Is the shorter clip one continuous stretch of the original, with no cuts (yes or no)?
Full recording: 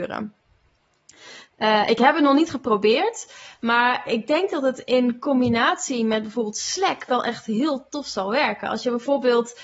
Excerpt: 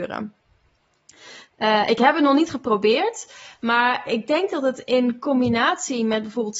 yes